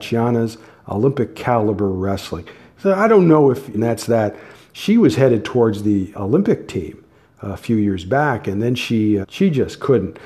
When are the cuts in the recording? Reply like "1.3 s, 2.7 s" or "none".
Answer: 3.7 s, 6.1 s, 9.2 s

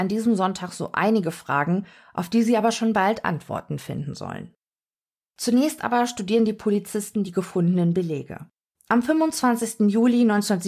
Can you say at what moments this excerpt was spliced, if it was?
8.7 s

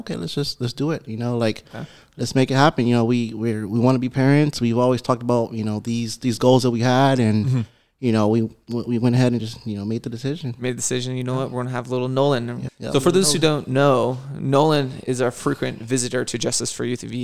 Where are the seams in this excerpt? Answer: 12.7 s

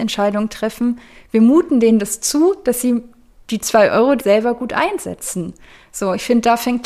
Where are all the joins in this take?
4.2 s

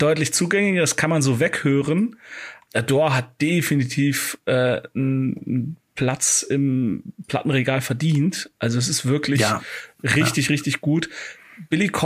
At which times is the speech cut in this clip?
2.7 s

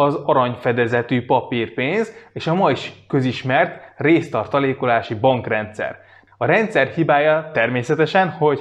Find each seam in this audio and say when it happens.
6.3 s

